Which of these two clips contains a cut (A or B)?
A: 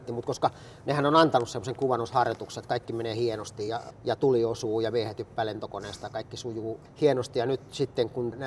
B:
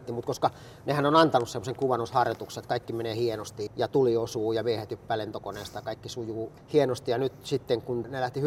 B